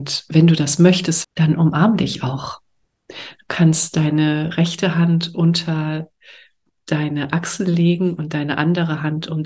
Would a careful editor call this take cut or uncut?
cut